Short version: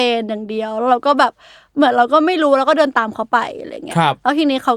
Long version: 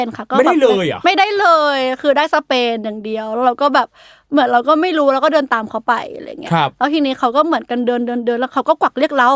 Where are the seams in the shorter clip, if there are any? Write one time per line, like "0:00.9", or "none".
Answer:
none